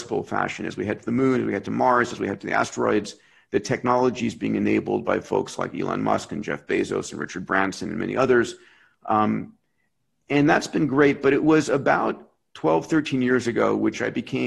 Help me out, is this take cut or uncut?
uncut